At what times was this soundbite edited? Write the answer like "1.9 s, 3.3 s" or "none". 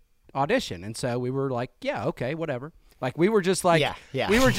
2.9 s